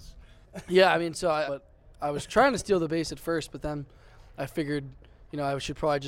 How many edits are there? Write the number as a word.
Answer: one